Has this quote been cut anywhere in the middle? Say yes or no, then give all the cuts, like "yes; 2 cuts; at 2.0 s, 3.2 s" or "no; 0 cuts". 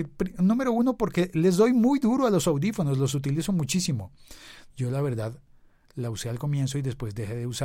yes; 1 cut; at 4.7 s